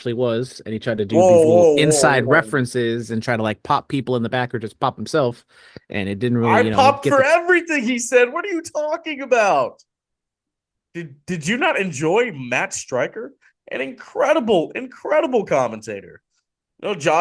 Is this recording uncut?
yes; 0 cuts

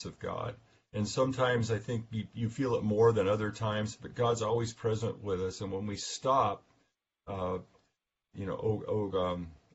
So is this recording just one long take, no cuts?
yes; 0 cuts

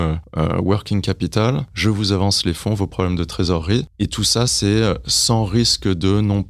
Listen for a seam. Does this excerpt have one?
no; 0 cuts

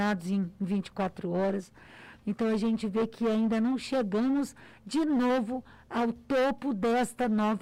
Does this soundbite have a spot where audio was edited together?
yes; 1 cut; at 2.2 s

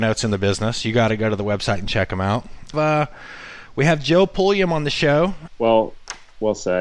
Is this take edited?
yes; 2 cuts; at 2.7 s, 5.5 s

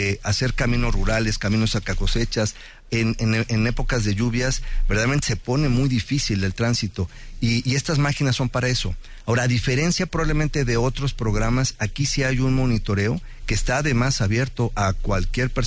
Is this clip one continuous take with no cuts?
yes; 0 cuts

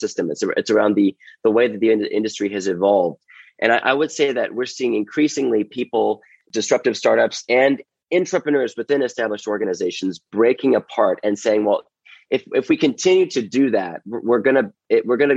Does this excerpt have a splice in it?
no; 0 cuts

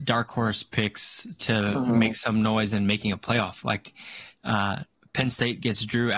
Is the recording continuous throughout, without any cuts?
yes; 0 cuts

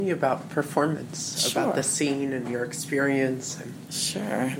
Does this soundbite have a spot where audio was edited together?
no; 0 cuts

